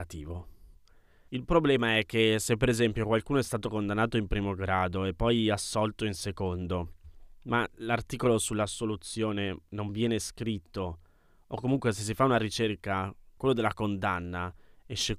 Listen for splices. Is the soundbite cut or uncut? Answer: cut